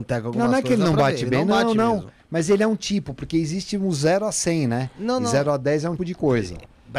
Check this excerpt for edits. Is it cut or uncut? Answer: cut